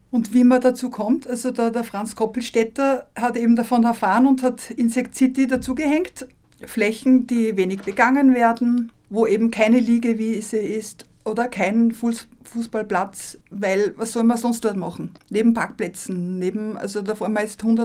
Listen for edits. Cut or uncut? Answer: cut